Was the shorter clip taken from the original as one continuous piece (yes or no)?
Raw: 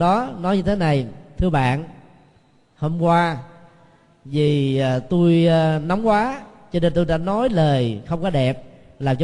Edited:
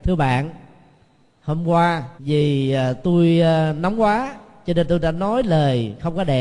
no